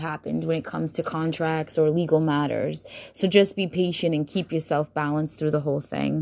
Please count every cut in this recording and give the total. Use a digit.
0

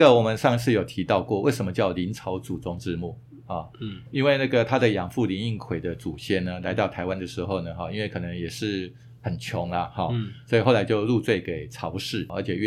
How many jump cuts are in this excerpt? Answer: 0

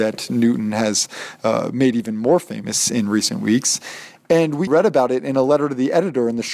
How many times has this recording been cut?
1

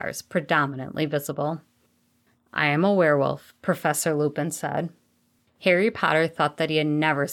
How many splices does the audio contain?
0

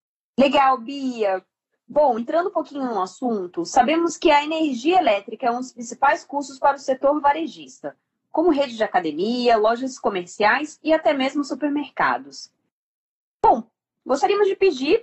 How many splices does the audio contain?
0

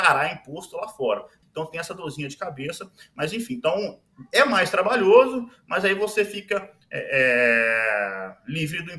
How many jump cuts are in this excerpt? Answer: 1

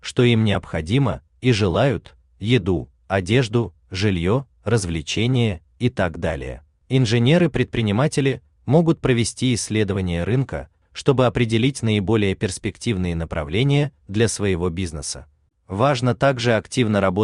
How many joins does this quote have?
2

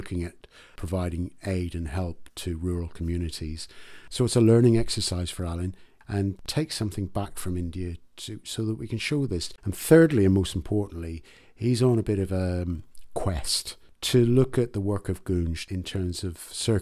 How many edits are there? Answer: 1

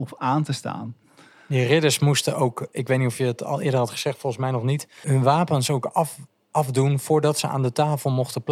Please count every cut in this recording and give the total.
1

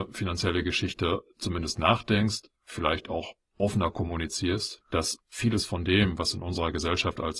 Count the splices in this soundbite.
1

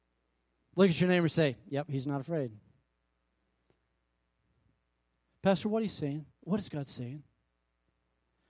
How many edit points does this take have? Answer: 0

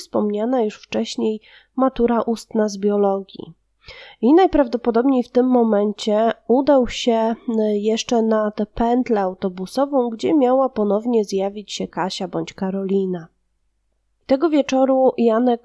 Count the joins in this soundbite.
0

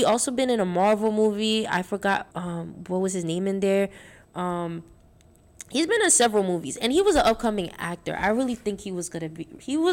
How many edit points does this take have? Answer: 1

